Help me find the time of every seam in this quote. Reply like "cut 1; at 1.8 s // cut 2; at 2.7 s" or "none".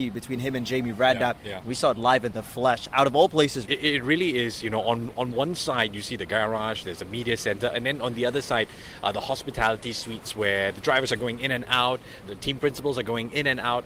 cut 1; at 3.7 s // cut 2; at 12.2 s